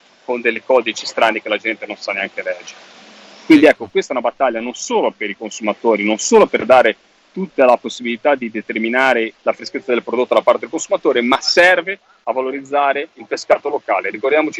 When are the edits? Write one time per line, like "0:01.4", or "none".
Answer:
0:09.3
0:13.1